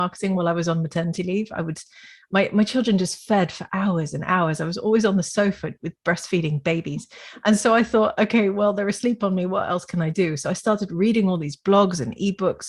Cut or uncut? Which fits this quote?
uncut